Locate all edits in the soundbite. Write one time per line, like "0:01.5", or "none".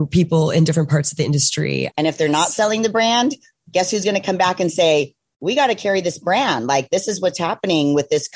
0:01.9

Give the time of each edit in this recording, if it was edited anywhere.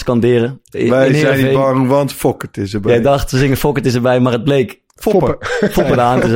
none

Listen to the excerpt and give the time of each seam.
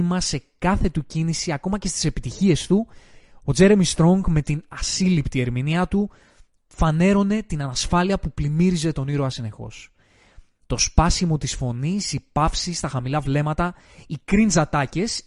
none

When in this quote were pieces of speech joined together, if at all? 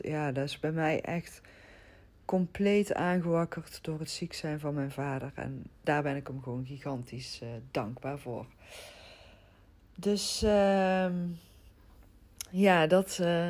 none

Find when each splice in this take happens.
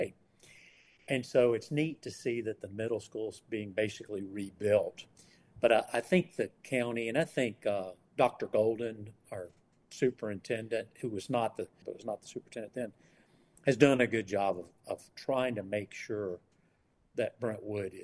0:11.8

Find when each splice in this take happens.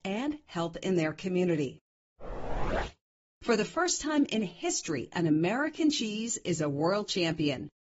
0:03.3

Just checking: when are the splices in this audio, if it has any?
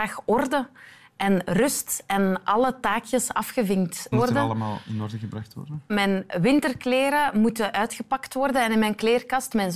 0:04.1
0:05.9

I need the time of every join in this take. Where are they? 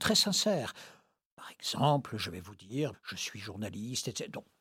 0:02.9

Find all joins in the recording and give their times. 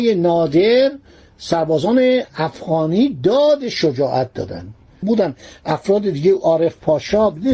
0:05.0

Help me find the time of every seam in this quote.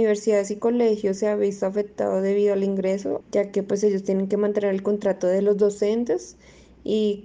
0:03.2

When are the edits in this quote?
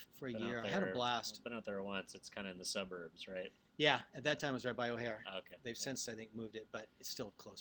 none

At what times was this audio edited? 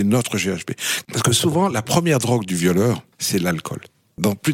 0:01.0
0:03.1

